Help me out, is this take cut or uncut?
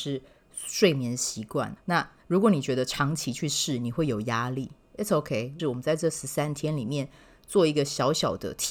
cut